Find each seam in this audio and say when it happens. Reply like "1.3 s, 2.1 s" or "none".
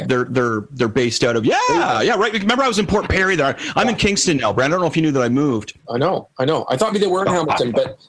5.8 s, 6.9 s